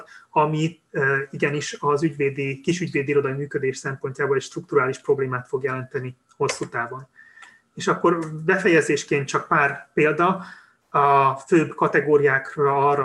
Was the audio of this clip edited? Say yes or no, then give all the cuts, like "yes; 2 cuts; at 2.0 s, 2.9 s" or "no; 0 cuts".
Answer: no; 0 cuts